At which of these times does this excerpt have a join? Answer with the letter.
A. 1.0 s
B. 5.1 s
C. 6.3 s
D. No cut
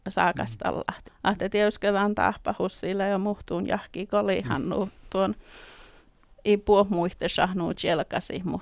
A